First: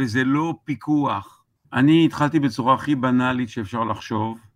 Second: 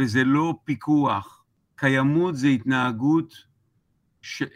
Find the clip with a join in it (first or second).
first